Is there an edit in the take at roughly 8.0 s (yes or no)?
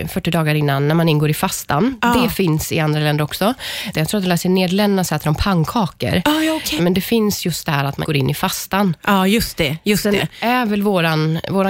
yes